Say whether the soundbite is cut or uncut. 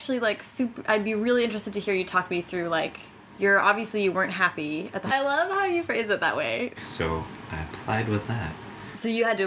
cut